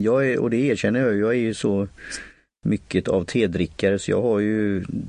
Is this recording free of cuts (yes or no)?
yes